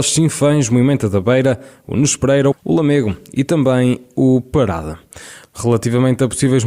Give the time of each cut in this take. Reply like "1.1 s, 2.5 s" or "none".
2.5 s, 5.4 s

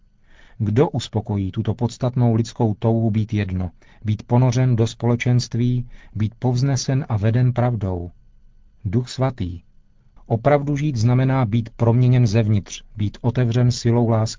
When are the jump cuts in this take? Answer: 10.2 s

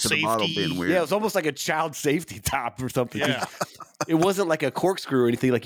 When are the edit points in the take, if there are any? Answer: none

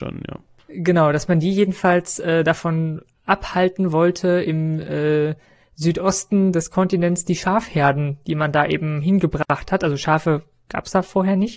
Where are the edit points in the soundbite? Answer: none

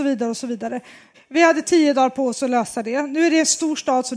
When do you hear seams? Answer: 1.1 s

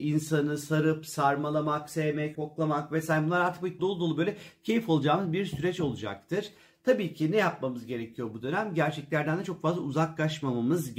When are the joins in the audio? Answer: 2.3 s, 3.8 s

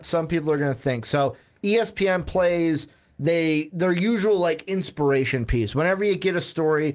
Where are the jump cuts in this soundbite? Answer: none

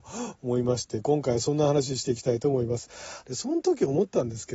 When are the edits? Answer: 3.2 s

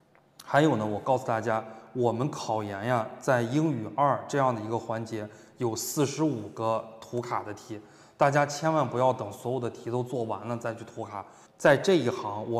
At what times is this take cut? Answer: 11.5 s

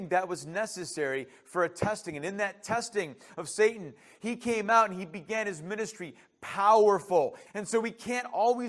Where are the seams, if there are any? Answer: 3.3 s, 7.5 s

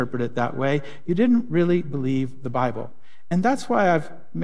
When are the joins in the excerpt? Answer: none

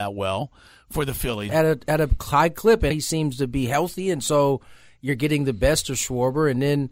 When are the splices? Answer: 1.5 s, 2.9 s

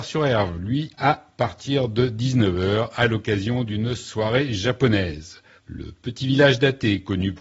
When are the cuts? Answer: 0.9 s, 5.6 s

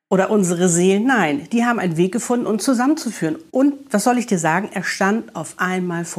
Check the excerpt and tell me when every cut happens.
none

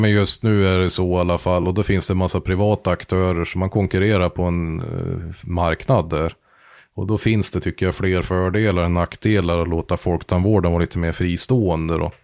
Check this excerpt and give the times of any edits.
none

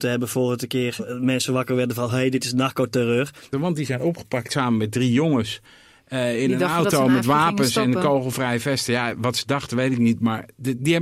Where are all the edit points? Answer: 1.0 s, 3.5 s

